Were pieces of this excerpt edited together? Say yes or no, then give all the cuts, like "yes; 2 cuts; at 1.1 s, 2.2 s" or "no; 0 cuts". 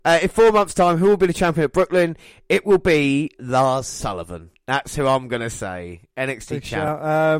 yes; 1 cut; at 3.4 s